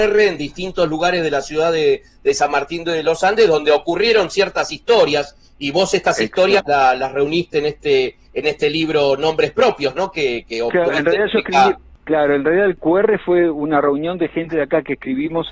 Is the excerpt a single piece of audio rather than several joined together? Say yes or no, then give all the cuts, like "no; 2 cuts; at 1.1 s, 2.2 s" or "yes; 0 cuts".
yes; 0 cuts